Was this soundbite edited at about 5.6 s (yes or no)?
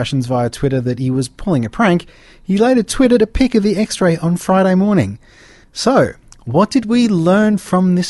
yes